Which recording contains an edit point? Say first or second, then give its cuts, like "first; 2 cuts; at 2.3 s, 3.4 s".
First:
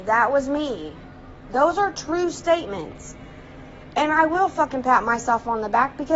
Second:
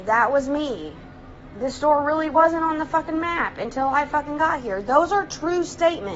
first; 1 cut; at 1.5 s